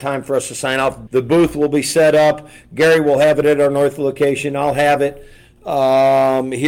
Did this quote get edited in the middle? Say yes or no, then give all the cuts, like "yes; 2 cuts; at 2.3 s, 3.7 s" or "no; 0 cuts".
yes; 1 cut; at 1.1 s